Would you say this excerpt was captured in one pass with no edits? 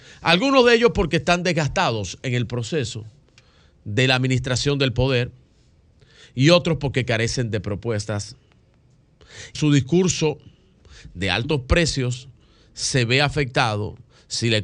no; 1 cut; at 9.5 s

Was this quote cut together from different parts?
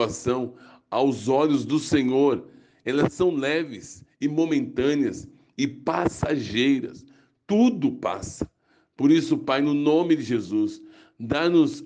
no; 0 cuts

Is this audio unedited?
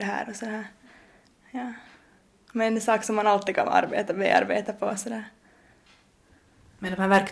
yes; 0 cuts

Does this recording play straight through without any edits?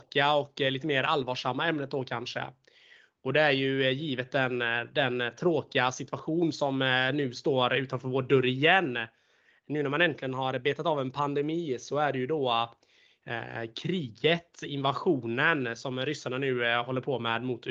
yes; 0 cuts

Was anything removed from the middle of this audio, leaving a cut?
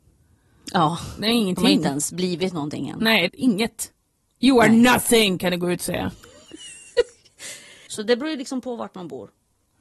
yes; 2 cuts; at 3.3 s, 7.9 s

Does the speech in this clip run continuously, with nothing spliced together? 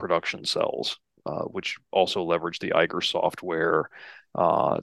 yes; 0 cuts

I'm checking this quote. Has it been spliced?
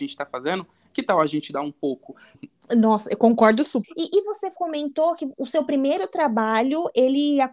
yes; 2 cuts; at 2.3 s, 3.8 s

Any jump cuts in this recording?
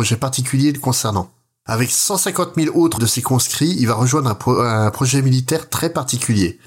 yes; 1 cut; at 3.0 s

